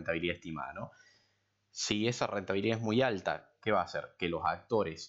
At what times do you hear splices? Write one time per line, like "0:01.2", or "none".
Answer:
none